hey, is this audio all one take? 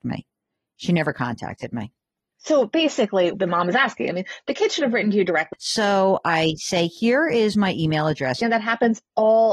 no; 3 cuts; at 3.3 s, 5.5 s, 8.4 s

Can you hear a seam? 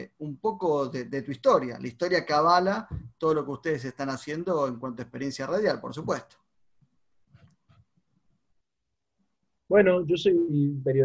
no; 0 cuts

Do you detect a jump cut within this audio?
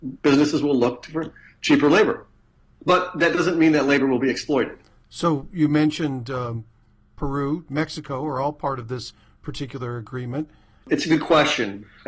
yes; 2 cuts; at 7.7 s, 10.8 s

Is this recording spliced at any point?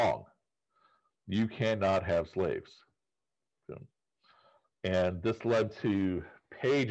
no; 0 cuts

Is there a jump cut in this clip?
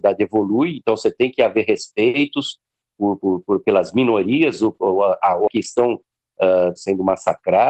yes; 2 cuts; at 5.5 s, 6.8 s

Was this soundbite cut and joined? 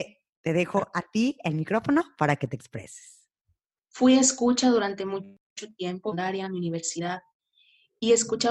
yes; 1 cut; at 3.8 s

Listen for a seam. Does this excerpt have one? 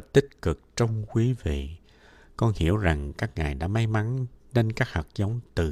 no; 0 cuts

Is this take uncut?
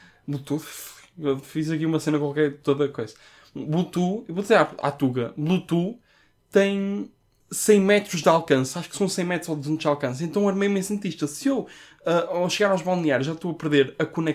yes; 0 cuts

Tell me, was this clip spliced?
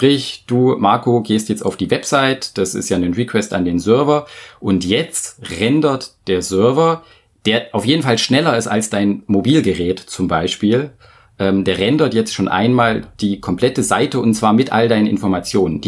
no; 0 cuts

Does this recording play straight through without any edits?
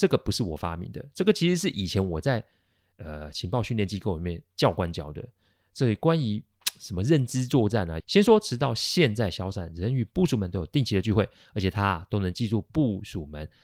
no; 1 cut; at 8.0 s

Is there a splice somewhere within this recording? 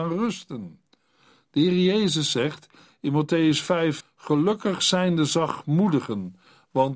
yes; 1 cut; at 4.0 s

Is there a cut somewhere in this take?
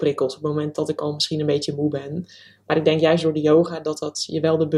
no; 0 cuts

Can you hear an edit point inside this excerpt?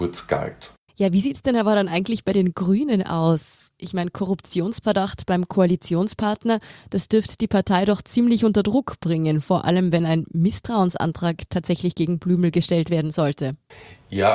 no; 0 cuts

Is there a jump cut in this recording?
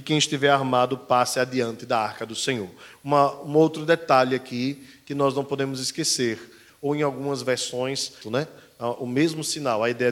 yes; 2 cuts; at 6.7 s, 8.2 s

